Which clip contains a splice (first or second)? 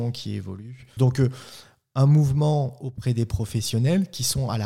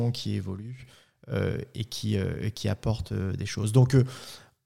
first